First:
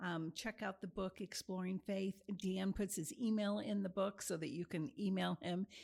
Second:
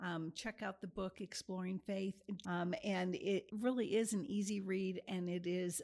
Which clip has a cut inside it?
second; 2 cuts; at 2.4 s, 3.5 s

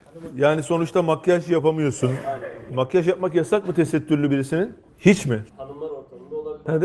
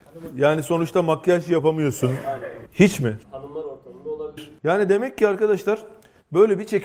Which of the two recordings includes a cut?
second; 2 cuts; at 2.7 s, 4.4 s

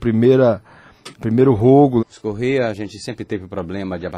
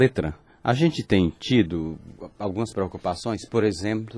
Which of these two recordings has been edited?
first; 1 cut; at 2.0 s

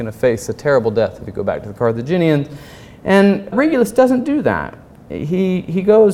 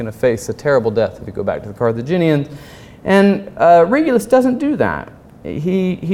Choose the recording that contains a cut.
first; 1 cut; at 3.5 s

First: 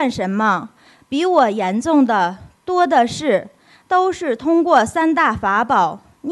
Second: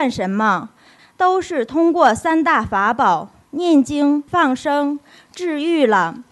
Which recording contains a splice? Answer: second; 2 cuts; at 1.0 s, 4.3 s

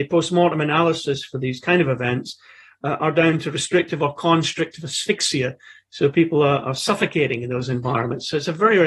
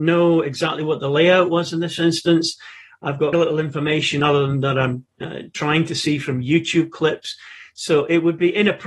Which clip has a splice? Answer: second; 1 cut; at 3.3 s

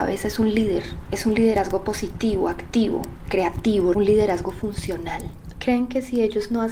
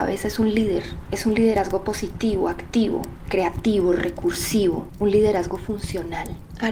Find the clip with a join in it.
first; 2 cuts; at 3.9 s, 5.5 s

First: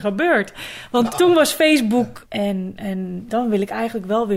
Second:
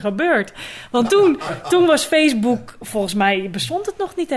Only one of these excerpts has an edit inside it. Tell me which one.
first; 3 cuts; at 1.1 s, 2.2 s, 3.3 s

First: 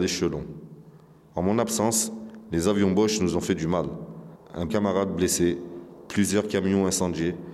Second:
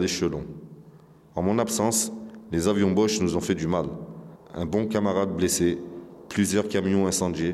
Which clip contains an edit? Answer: first; 1 cut; at 4.7 s

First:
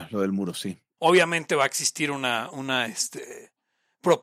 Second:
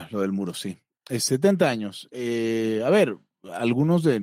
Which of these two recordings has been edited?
first; 1 cut; at 1.0 s

